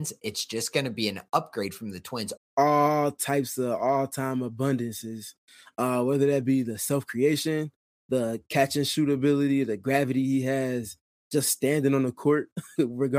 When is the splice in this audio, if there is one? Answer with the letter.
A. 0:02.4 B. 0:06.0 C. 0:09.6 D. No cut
A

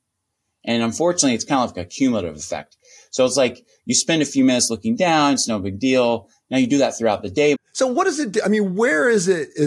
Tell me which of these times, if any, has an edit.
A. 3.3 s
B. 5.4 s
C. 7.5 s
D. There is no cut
C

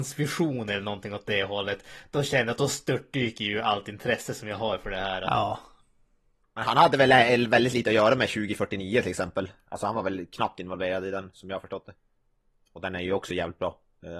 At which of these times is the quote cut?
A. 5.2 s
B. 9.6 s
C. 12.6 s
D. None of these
D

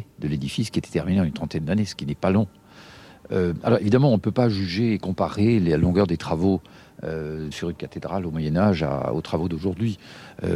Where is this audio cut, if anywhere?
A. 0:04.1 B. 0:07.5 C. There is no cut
B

